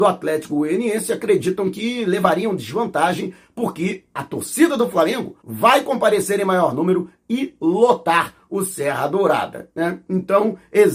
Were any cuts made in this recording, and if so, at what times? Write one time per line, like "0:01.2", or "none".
0:05.4